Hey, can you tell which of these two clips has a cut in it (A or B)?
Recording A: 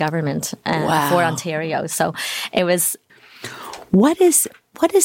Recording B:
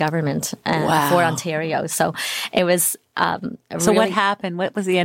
A